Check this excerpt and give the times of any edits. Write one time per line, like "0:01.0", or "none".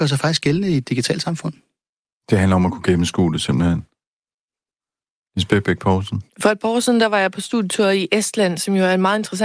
0:06.3